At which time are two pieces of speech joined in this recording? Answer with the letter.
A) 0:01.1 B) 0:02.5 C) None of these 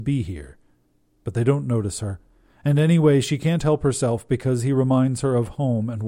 C